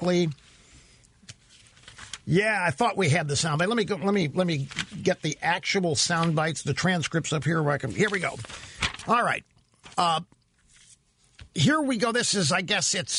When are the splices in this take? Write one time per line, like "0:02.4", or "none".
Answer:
0:09.9
0:11.5